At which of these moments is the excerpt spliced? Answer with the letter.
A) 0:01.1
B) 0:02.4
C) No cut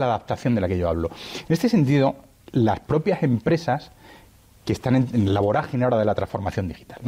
C